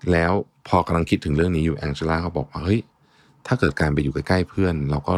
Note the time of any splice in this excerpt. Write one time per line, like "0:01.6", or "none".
none

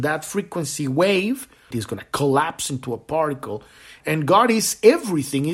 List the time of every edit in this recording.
0:01.7
0:04.0

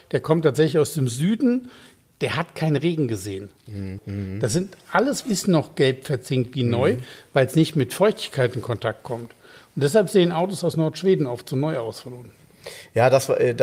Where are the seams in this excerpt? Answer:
0:04.0
0:05.2

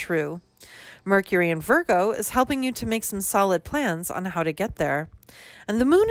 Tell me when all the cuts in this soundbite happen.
none

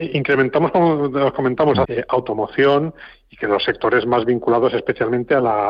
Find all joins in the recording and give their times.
0:01.8

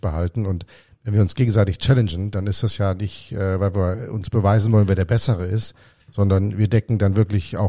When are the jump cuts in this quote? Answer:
none

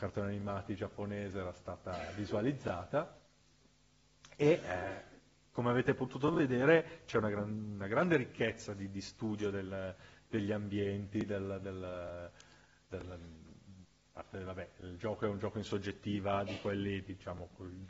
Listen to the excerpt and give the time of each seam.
none

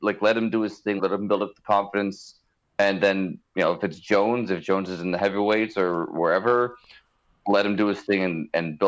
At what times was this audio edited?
0:01.0

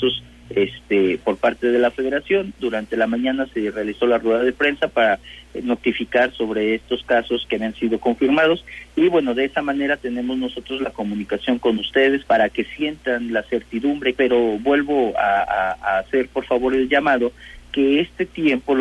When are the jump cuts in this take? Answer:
0:12.2
0:14.2

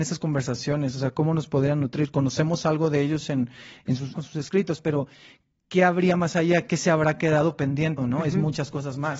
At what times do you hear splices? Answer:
0:04.1
0:08.0

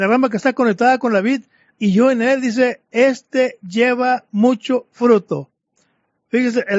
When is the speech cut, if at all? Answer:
0:01.8

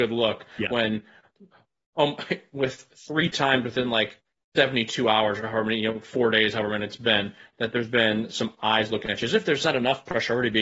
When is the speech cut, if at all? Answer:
none

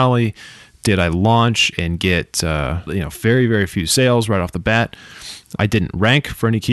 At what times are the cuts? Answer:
0:02.9
0:05.6

